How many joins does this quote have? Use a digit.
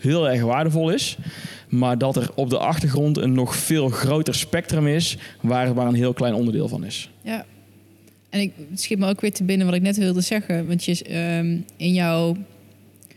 0